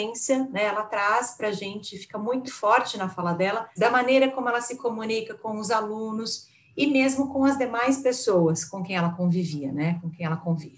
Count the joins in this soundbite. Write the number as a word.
two